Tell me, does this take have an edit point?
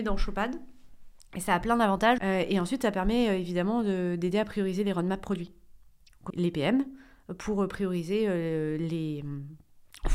yes; 2 cuts; at 2.2 s, 6.3 s

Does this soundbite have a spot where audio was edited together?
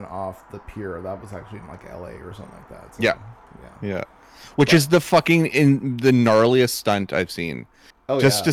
no; 0 cuts

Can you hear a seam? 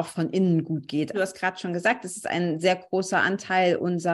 yes; 1 cut; at 1.1 s

